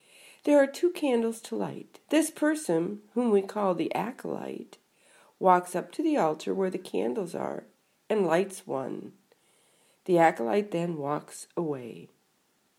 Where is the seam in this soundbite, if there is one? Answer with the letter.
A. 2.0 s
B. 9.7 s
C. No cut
A